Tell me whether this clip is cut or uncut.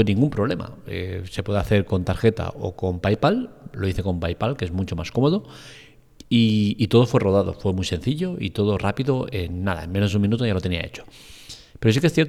uncut